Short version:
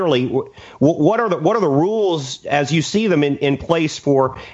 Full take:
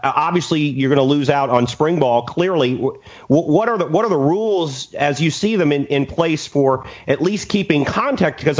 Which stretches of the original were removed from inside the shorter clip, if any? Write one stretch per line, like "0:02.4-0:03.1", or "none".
none

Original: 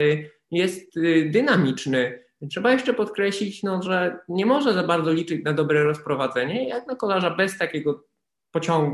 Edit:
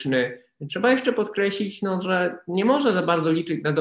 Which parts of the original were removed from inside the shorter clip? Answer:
none

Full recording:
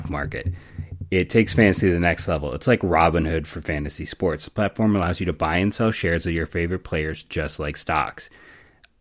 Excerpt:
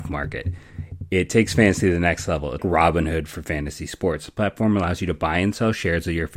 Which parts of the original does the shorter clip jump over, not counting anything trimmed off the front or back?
0:02.6-0:02.8

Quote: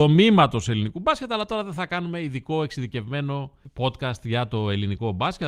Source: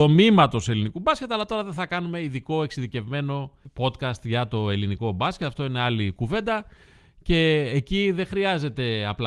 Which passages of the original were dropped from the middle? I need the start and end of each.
none

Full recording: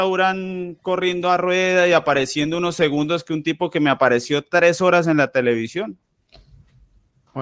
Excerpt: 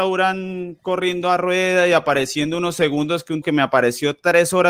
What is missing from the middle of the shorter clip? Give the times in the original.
0:03.4-0:03.7

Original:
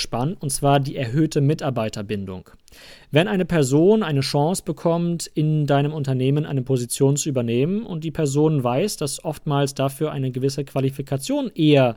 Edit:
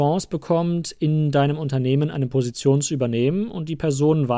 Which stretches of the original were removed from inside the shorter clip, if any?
none

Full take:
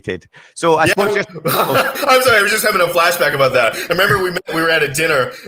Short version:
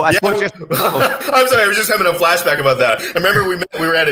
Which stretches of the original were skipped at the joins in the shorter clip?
none

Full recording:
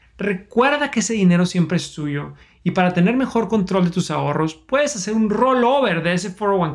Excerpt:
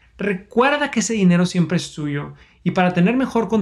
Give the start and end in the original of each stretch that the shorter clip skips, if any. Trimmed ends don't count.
none

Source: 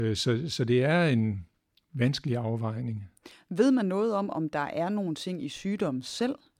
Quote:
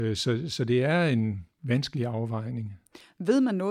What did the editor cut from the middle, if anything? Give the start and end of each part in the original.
0:01.5-0:01.8

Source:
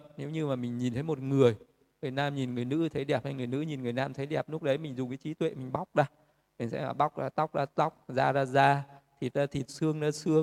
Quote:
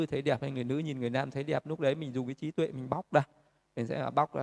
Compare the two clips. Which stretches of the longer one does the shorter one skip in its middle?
none

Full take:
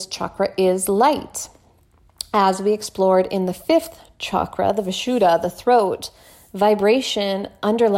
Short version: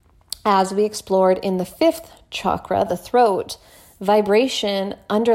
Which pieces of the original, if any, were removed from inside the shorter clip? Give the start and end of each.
0:04.7-0:05.4

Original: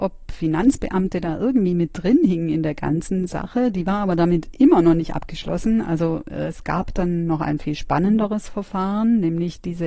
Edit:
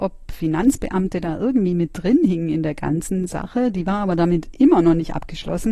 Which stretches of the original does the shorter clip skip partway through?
none

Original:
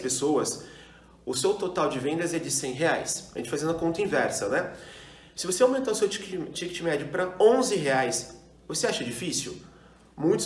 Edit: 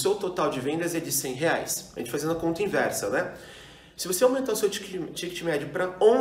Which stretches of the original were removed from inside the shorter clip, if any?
none

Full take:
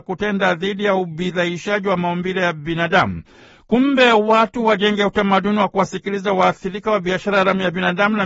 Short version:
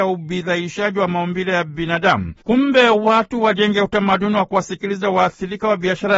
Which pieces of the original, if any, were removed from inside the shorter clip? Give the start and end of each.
0:03.3-0:03.6

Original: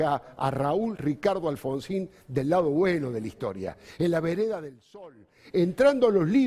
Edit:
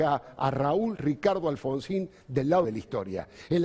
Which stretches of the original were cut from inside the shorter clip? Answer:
0:02.6-0:03.1

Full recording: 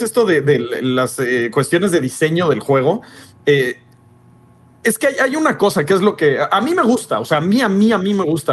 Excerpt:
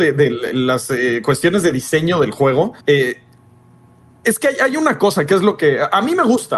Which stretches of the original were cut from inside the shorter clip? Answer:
0:03.1-0:03.4

